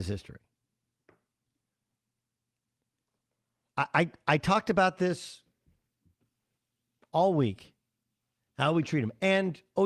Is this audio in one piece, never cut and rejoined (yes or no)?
no